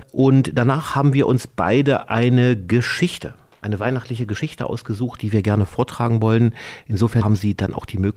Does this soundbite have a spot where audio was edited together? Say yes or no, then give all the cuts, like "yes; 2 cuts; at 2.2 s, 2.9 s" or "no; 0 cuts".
yes; 1 cut; at 7.2 s